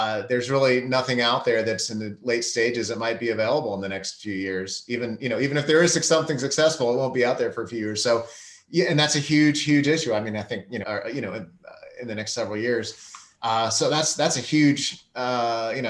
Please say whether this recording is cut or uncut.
cut